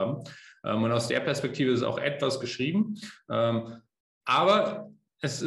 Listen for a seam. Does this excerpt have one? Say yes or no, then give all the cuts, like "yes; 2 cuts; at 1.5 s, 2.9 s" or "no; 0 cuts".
no; 0 cuts